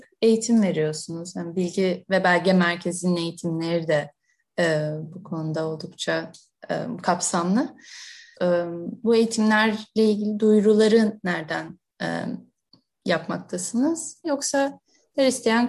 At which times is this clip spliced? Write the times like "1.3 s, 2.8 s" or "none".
8.3 s, 14.2 s